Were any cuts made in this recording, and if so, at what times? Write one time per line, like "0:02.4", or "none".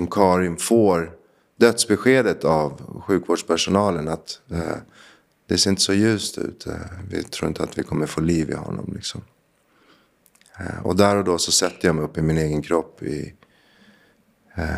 none

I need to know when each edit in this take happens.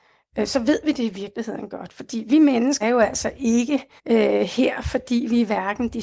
0:02.8
0:04.0

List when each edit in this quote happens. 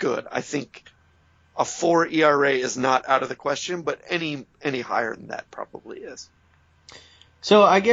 none

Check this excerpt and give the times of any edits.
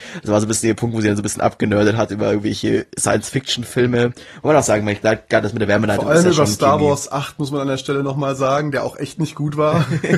none

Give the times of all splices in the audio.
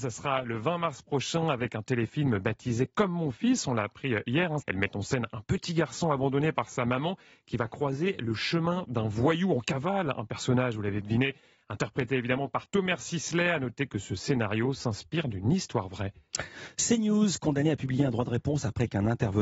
0:04.6

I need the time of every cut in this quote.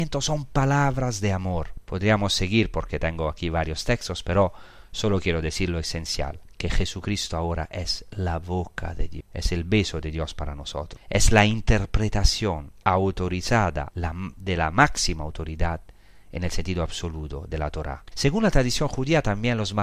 0:13.9
0:18.1

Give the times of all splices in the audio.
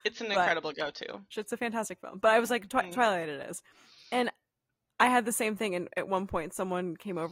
0:01.3

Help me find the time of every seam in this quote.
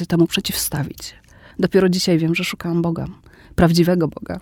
0:01.5

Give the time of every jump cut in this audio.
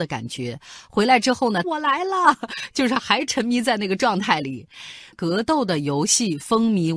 0:01.6
0:05.1

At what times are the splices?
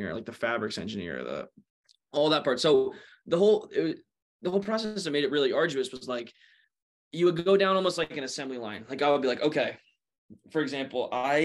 none

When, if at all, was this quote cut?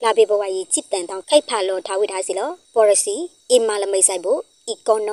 0:01.2

